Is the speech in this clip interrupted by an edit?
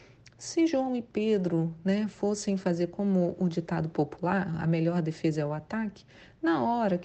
no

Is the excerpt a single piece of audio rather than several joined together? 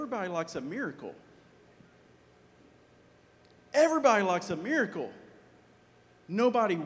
yes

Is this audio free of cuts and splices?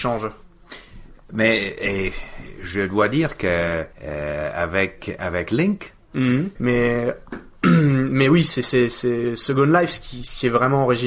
no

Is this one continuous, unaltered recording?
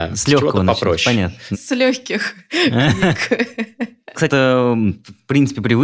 no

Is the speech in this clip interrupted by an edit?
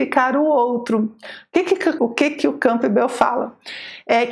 yes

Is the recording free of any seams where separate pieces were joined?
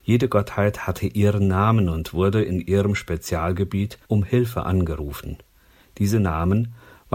no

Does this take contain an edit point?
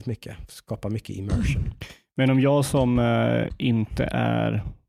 no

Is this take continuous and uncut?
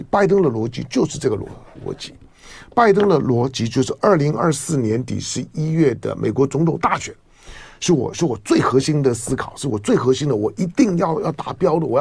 yes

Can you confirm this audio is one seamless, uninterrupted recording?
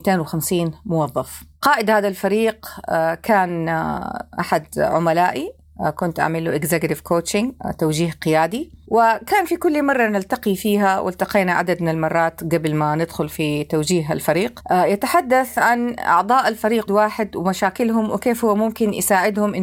no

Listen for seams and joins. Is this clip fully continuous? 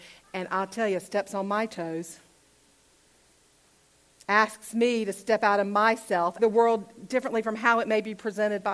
no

